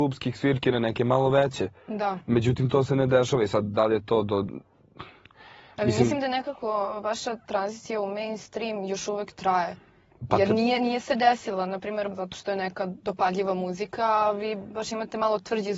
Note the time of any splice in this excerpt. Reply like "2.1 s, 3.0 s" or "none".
12.1 s